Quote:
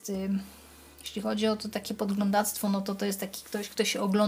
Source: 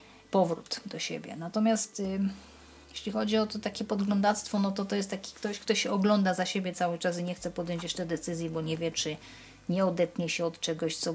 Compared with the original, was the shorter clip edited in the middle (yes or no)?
no